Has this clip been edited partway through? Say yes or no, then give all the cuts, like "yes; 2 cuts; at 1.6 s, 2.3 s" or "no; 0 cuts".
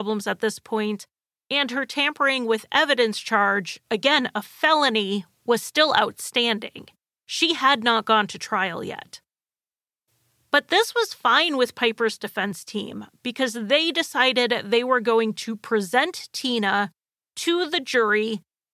no; 0 cuts